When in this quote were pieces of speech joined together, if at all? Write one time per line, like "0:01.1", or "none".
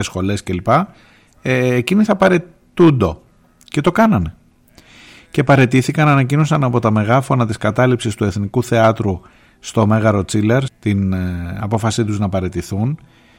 0:10.7